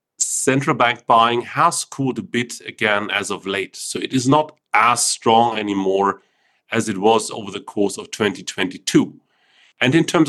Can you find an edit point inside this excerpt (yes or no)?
no